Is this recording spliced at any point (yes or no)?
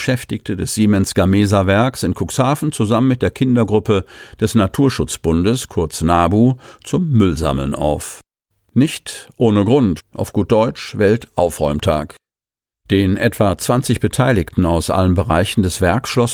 yes